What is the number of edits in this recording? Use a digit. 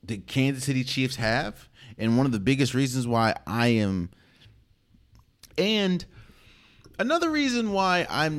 1